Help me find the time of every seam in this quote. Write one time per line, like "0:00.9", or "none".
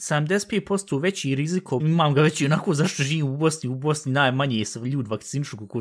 0:01.8